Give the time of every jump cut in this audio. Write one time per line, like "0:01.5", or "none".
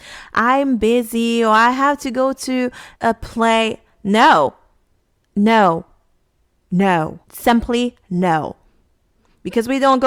0:07.2